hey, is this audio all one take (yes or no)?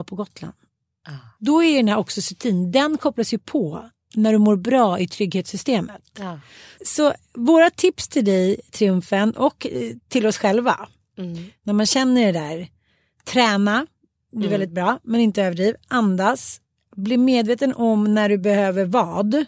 yes